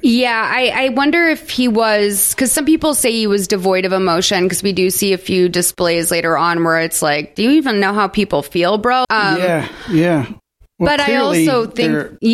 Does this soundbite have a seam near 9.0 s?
yes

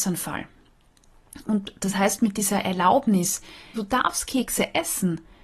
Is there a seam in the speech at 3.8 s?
yes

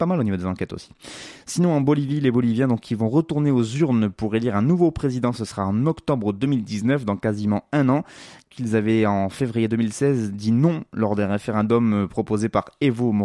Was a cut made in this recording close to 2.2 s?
no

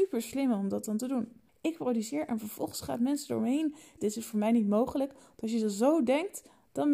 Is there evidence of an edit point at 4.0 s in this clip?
yes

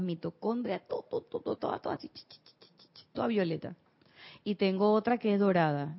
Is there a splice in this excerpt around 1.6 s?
yes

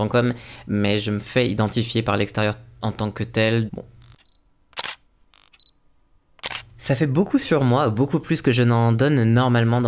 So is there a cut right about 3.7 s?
yes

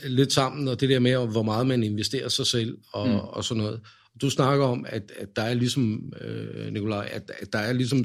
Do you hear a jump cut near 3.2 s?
no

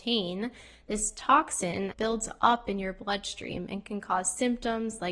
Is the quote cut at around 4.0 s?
no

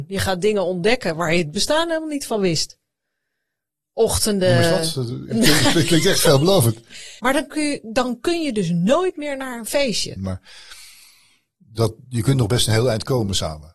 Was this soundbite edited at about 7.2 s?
yes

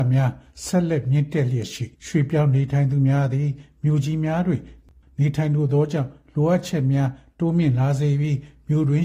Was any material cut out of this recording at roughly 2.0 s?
yes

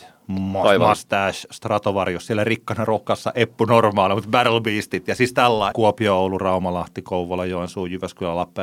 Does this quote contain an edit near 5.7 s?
yes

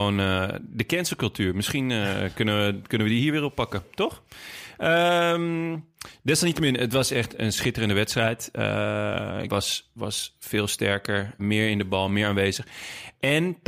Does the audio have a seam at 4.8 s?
no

